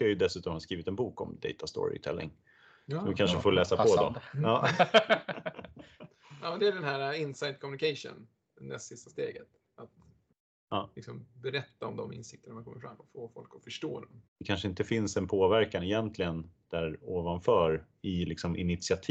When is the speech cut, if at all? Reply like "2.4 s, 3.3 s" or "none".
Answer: 14.3 s, 17.9 s

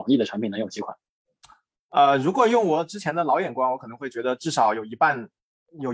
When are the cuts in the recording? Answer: none

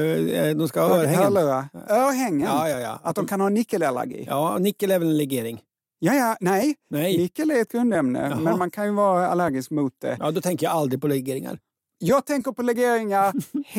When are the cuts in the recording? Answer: none

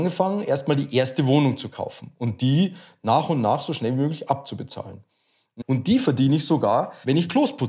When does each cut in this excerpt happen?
5.6 s

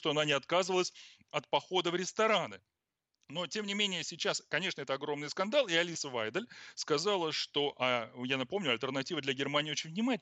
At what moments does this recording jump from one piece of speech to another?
none

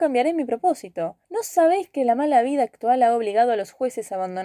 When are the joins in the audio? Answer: 1.2 s

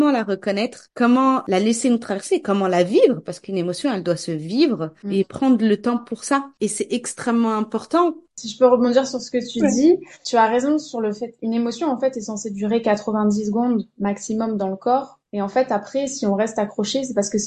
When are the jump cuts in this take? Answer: none

